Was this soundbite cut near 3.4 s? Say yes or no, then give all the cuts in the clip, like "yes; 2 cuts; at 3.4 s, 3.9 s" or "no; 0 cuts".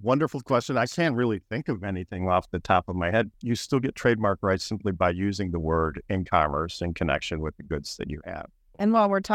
yes; 1 cut; at 3.4 s